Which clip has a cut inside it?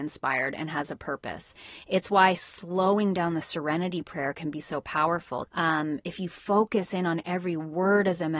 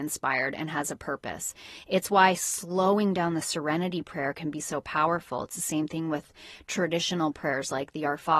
first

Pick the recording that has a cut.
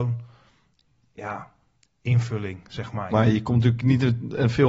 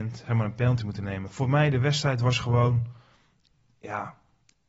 first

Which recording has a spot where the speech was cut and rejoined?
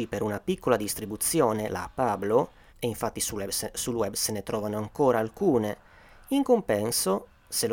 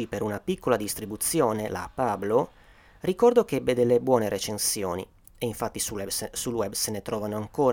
first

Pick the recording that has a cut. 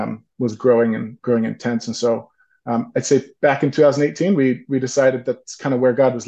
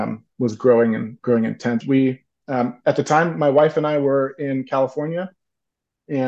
second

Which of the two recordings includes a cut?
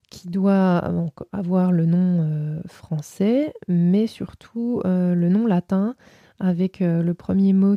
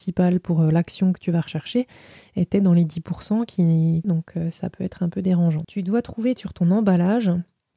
second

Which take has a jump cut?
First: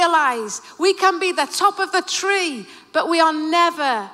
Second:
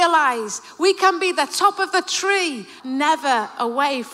second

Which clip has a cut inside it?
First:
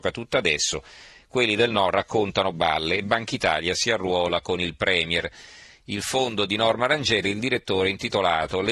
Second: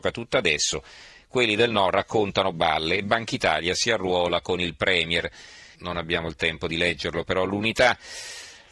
second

